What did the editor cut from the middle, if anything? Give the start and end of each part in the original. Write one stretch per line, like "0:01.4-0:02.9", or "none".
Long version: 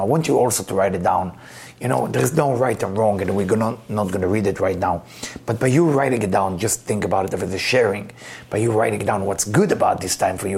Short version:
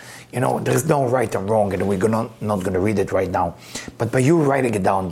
none

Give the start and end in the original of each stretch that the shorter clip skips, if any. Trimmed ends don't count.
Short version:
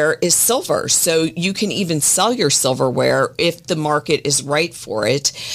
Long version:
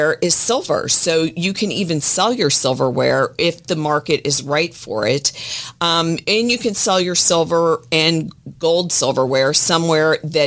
none

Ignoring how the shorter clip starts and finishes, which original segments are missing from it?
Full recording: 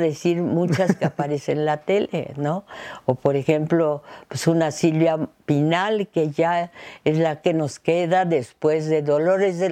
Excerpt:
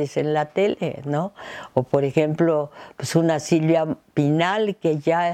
none

